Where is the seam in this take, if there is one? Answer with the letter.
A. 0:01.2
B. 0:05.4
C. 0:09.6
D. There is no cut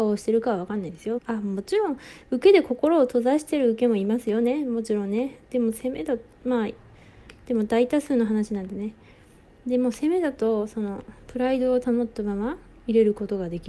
A